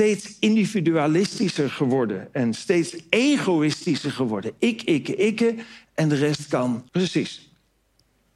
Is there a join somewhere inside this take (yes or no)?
yes